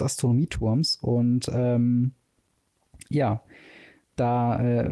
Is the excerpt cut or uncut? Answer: uncut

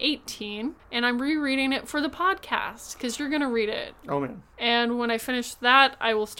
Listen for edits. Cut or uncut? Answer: cut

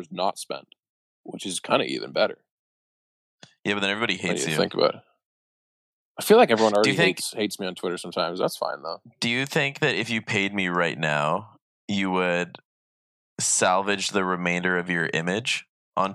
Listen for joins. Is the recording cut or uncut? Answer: uncut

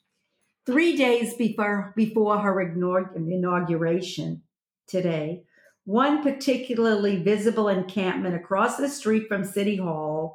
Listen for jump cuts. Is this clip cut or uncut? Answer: uncut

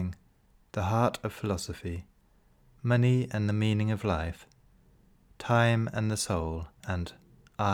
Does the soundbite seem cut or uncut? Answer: cut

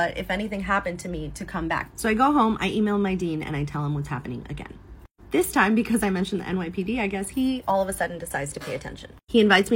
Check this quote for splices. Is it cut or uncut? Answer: cut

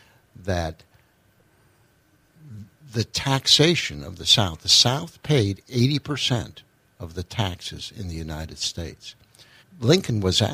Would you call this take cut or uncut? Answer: cut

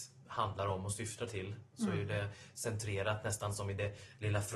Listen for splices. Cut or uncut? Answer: uncut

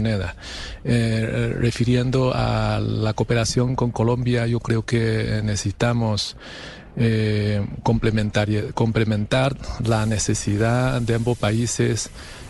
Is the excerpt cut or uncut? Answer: uncut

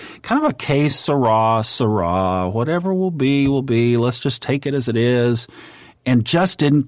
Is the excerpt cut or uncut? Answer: uncut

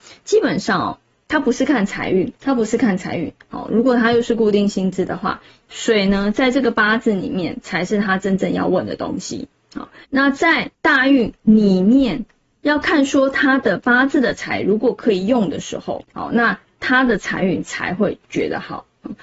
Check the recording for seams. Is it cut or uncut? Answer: cut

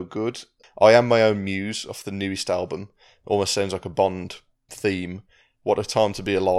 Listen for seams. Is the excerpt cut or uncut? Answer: cut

